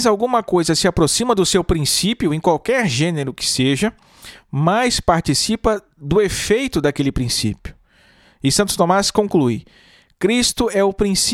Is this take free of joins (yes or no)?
yes